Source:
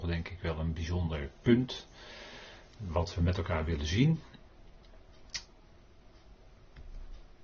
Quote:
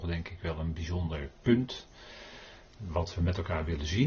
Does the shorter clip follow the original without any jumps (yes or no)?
yes